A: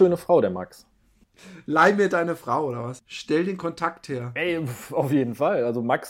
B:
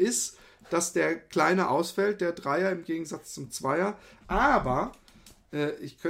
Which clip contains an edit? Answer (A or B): B